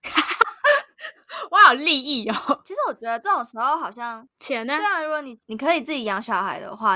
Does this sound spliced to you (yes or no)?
no